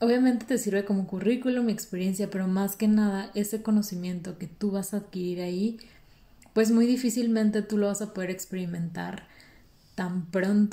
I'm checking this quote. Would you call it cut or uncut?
uncut